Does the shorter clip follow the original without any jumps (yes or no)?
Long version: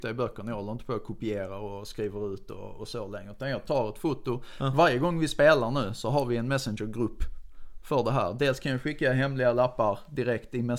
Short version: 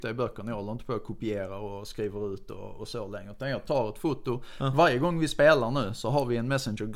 yes